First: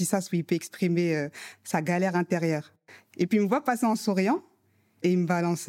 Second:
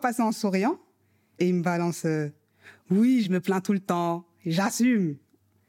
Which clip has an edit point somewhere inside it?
second; 1 cut; at 3.2 s

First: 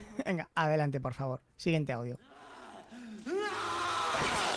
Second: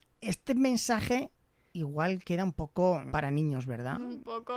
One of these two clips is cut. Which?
second; 2 cuts; at 1.7 s, 3.1 s

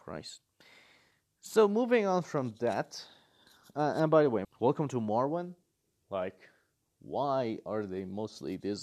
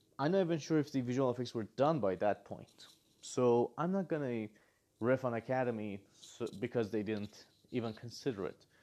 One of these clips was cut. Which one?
first; 2 cuts; at 4.4 s, 5.9 s

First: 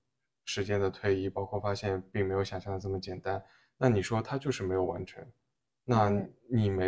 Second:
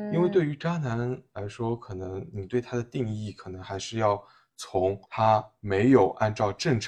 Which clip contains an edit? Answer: second; 2 cuts; at 2.3 s, 5.0 s

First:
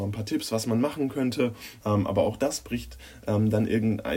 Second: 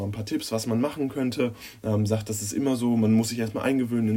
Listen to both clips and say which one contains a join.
first; 1 cut; at 1.8 s

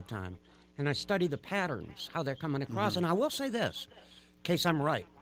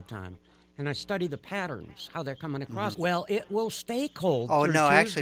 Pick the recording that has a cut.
second; 1 cut; at 2.9 s

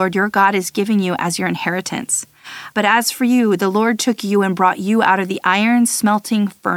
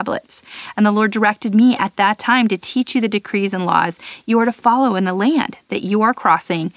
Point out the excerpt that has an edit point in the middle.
first; 1 cut; at 2.7 s

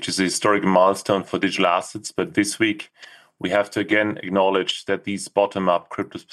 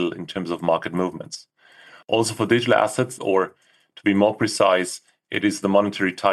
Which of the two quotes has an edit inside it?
second; 1 cut; at 3.2 s

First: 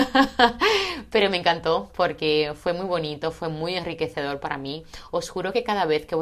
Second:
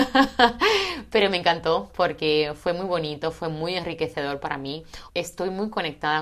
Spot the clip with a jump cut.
second; 1 cut; at 5.1 s

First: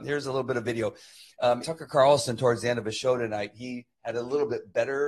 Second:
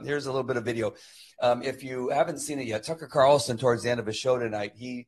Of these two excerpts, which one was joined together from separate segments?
first; 1 cut; at 1.6 s

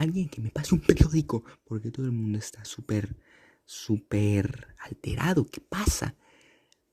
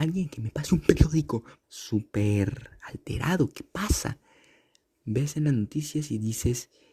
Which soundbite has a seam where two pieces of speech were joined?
second; 1 cut; at 1.6 s

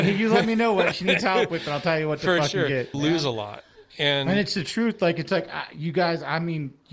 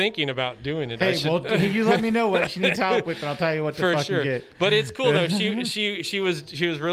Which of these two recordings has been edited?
first; 1 cut; at 2.9 s

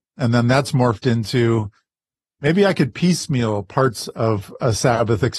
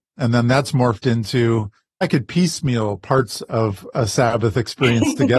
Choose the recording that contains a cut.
second; 1 cut; at 2.0 s

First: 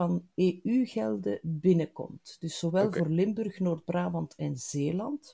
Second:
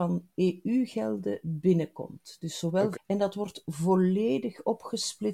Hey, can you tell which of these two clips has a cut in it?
second; 1 cut; at 2.9 s

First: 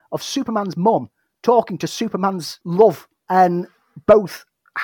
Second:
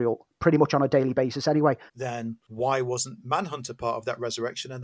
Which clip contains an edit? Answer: second; 1 cut; at 1.9 s

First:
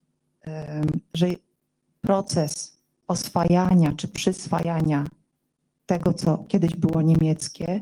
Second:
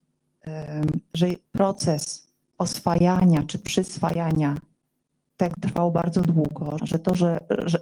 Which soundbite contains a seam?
second; 3 cuts; at 1.5 s, 5.6 s, 6.8 s

